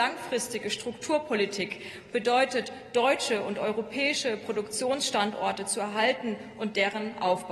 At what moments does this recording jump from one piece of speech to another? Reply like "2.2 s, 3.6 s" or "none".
none